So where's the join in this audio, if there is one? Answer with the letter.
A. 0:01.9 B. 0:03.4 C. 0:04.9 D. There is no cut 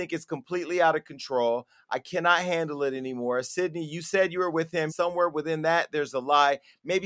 C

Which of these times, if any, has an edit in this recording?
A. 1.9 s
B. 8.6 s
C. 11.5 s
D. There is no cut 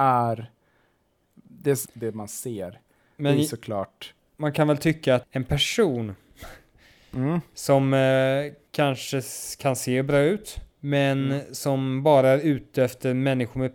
A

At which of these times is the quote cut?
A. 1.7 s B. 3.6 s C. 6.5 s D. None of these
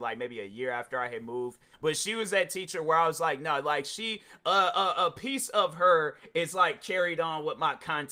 A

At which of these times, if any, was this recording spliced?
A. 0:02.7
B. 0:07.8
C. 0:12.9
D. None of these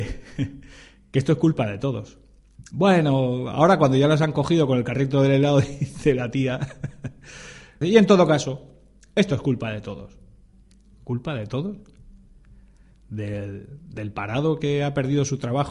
B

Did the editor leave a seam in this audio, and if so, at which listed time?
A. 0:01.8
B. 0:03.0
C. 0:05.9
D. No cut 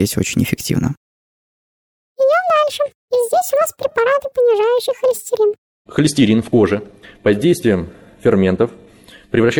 C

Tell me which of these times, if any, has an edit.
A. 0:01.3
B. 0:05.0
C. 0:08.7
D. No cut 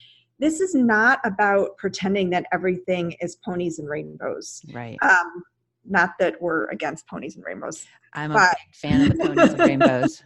D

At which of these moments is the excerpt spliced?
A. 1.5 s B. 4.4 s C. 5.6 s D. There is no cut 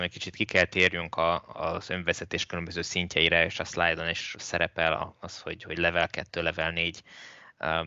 B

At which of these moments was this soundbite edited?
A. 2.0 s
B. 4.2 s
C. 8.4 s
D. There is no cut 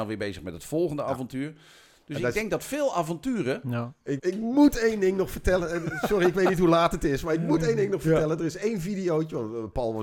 B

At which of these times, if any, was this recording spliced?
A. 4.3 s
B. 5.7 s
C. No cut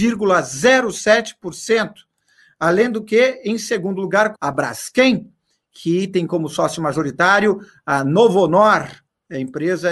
A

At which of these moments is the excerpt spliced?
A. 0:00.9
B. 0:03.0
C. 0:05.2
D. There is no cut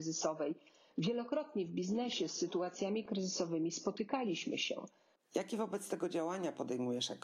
C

